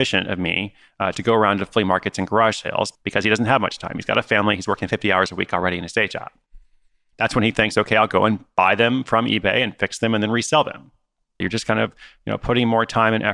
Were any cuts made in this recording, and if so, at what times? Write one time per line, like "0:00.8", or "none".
0:11.4